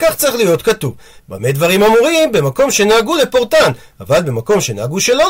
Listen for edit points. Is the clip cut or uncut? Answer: cut